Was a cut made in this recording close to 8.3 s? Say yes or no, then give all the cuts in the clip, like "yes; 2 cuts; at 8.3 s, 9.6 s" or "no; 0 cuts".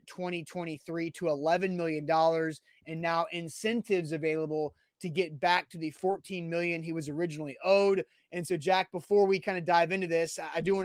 no; 0 cuts